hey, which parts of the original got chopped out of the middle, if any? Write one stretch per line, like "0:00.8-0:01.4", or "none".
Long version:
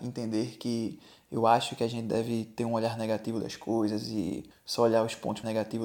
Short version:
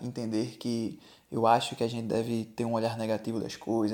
none

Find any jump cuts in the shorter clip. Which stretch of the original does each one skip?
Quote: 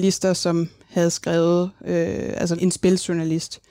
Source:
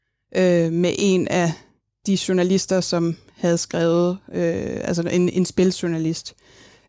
0:05.0-0:05.3

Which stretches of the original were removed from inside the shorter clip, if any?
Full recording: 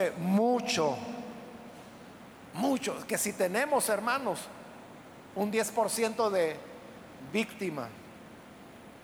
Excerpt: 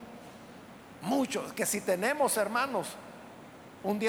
none

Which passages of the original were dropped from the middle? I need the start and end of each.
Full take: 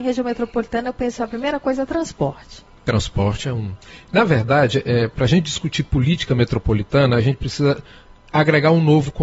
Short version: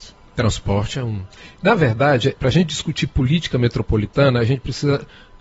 0:04.8-0:05.1

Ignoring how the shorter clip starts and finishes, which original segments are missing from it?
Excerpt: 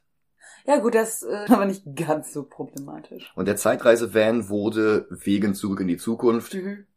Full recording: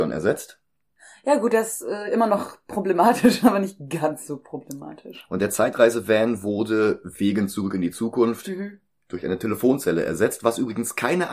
0:02.1-0:03.4

